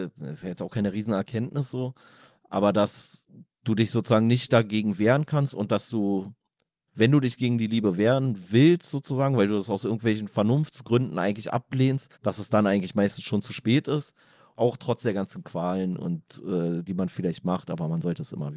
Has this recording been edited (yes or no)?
yes